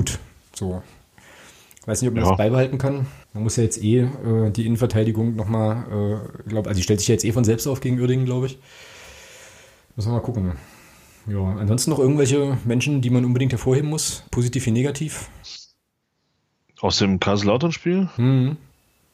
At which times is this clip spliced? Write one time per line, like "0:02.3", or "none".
0:03.2